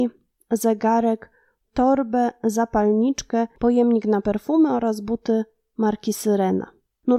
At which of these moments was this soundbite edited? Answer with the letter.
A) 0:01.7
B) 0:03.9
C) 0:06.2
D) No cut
A